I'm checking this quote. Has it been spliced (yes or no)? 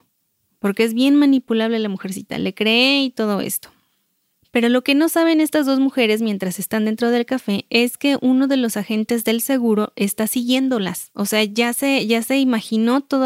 no